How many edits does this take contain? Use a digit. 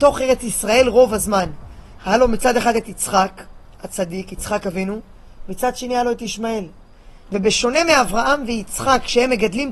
2